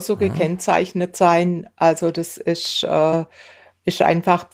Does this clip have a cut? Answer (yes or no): no